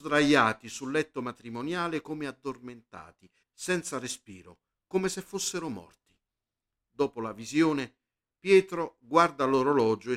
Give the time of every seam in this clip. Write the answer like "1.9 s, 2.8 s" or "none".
3.4 s